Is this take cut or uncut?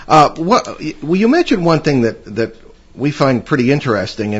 uncut